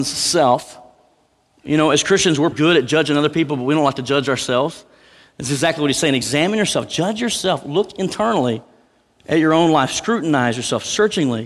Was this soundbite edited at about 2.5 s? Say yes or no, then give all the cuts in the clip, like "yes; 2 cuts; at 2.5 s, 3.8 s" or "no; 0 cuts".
yes; 1 cut; at 2.5 s